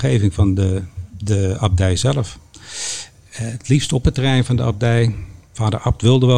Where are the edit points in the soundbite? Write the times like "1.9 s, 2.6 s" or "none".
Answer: 1.1 s